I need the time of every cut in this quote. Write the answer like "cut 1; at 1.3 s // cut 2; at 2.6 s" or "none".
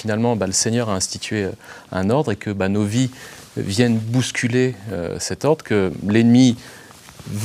none